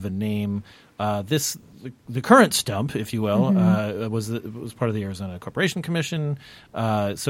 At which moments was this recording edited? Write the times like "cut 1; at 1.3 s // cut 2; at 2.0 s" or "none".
none

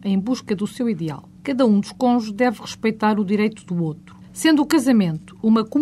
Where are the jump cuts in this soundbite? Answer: cut 1; at 1.4 s // cut 2; at 4.2 s

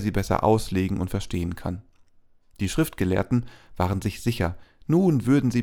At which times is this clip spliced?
none

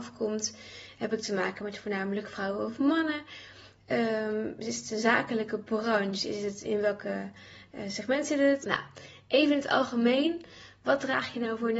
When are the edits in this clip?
cut 1; at 6.6 s // cut 2; at 8.6 s

